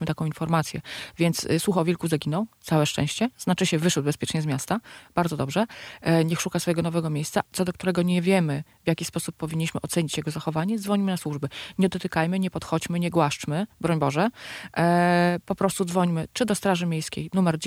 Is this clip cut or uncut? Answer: cut